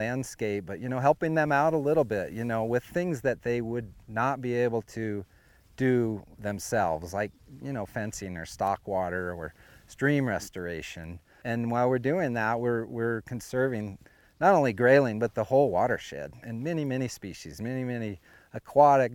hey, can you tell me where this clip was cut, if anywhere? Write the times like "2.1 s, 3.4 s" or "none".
none